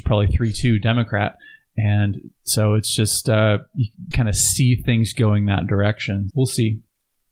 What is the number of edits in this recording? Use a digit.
2